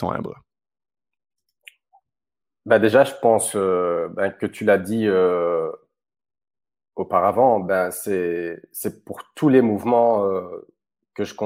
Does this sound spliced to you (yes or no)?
no